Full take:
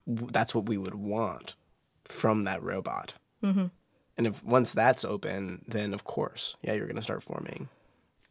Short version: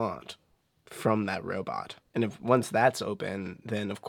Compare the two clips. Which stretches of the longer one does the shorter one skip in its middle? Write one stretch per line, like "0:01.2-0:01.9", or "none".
0:03.2-0:04.0